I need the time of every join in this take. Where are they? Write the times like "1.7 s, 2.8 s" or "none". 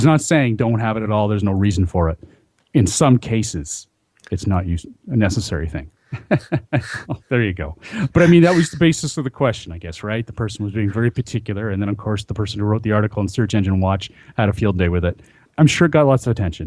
6.0 s

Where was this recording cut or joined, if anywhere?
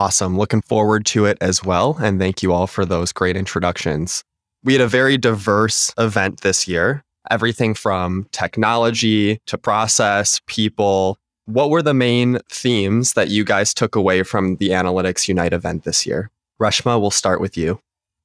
none

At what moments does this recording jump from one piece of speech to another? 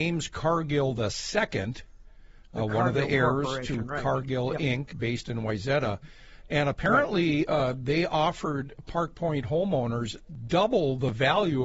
none

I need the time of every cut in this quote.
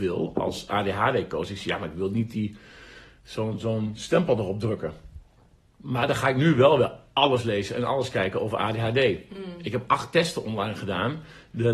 none

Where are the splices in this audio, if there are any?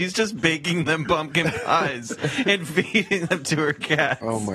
none

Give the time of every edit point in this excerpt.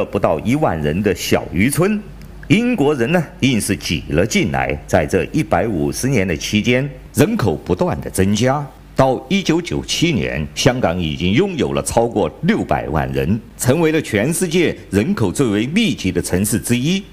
none

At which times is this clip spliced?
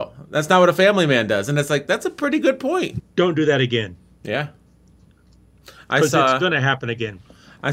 3.0 s

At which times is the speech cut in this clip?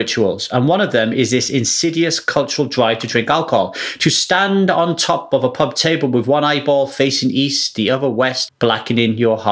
8.5 s

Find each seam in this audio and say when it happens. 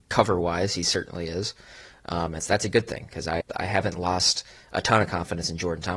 2.4 s, 3.4 s

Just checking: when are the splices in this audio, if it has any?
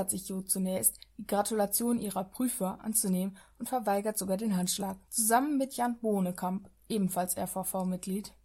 5.1 s

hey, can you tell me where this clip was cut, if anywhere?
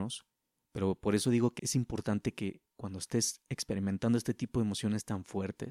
1.6 s

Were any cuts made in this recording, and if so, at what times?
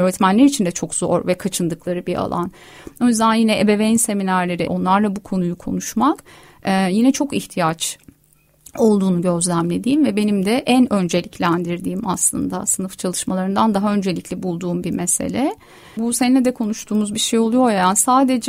4.7 s, 16.0 s

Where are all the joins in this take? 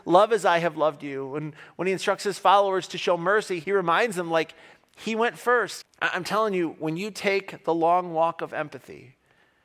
3.6 s, 5.8 s

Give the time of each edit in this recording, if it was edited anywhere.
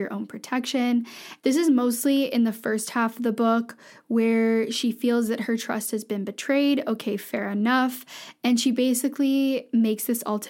1.4 s

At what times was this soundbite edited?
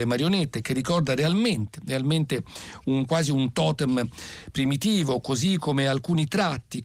none

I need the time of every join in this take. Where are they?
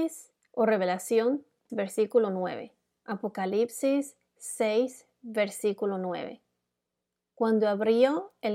1.7 s

